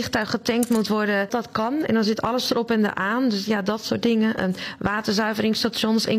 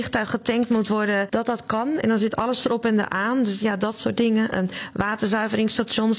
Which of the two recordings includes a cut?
first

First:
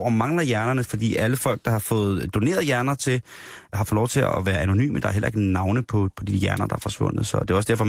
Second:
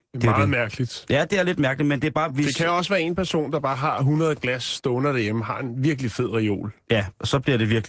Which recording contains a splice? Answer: first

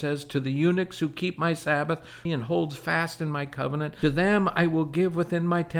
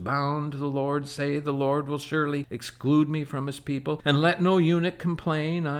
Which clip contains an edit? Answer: first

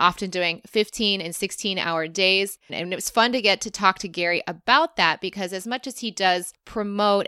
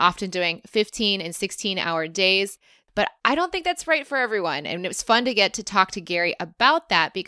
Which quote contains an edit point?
first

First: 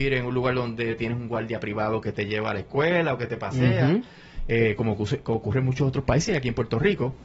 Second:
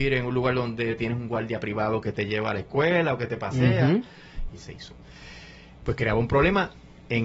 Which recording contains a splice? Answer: second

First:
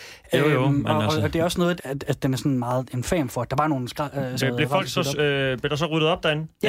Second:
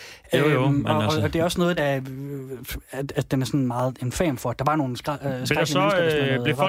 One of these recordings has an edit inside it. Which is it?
first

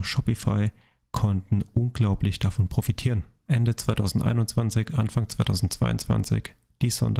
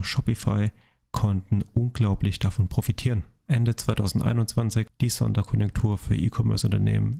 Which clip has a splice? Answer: second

